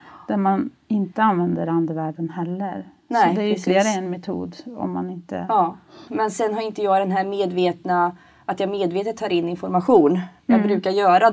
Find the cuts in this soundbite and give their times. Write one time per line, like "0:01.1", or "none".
0:06.1
0:10.4